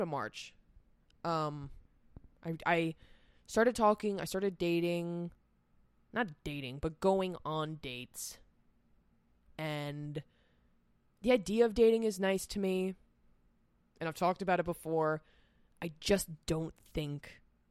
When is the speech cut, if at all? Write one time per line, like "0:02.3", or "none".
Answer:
0:02.4